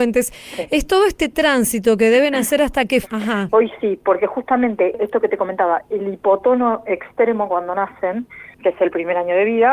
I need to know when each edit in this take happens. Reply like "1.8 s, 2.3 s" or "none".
3.0 s, 8.6 s